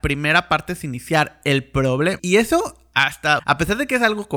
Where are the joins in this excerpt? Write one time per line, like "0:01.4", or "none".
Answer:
0:02.2
0:03.4